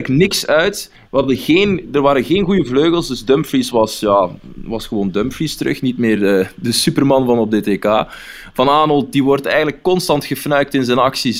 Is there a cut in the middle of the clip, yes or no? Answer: no